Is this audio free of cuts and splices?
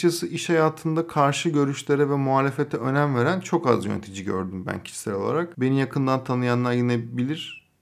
yes; 0 cuts

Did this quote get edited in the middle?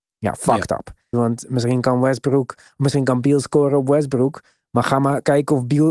yes; 1 cut; at 1.1 s

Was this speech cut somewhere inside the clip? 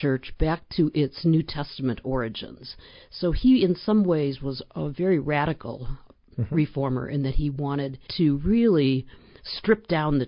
yes; 1 cut; at 8.1 s

